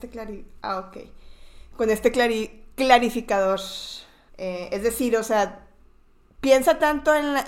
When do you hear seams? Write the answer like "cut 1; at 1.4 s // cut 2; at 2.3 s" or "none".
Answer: cut 1; at 4.3 s